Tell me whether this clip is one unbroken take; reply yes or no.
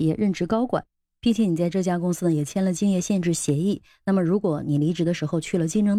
yes